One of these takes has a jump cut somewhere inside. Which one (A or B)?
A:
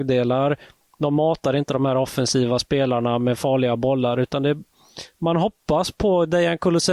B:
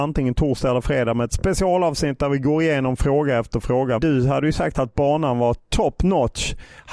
B